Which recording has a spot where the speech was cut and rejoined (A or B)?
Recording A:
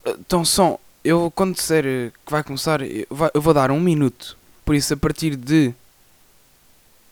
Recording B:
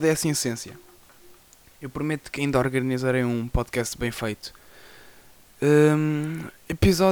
A